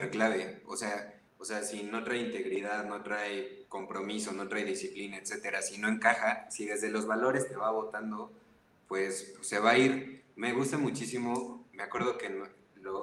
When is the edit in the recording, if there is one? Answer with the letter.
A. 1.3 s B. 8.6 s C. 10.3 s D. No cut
A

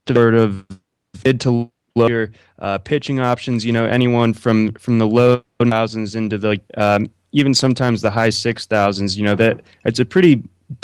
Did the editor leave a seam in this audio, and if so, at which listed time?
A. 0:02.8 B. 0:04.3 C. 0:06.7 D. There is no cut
C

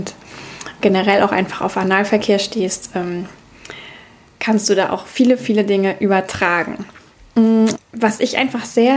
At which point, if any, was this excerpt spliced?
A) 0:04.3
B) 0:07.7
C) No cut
B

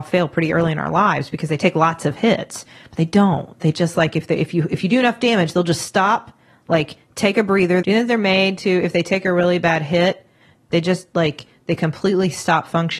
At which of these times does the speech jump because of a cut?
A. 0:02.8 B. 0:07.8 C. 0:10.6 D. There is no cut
B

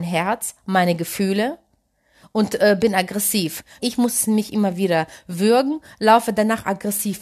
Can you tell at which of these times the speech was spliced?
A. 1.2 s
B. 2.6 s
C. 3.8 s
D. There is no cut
C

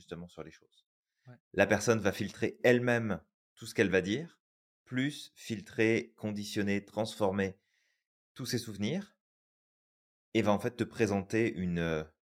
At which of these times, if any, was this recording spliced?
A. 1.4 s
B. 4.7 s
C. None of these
A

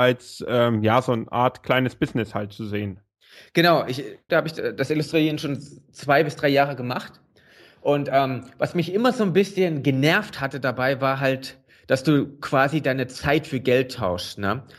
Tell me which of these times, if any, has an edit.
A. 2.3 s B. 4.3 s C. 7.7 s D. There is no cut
B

